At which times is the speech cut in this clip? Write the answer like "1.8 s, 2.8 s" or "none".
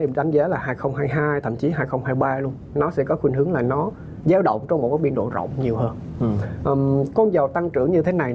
none